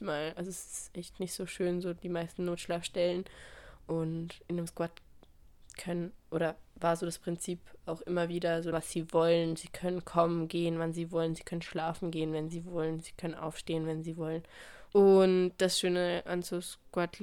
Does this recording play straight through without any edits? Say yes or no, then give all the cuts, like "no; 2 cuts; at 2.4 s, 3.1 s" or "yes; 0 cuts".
no; 2 cuts; at 8.7 s, 14.9 s